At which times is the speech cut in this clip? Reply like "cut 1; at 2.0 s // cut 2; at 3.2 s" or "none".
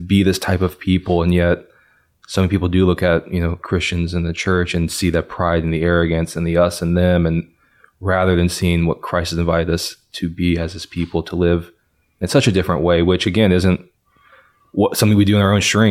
none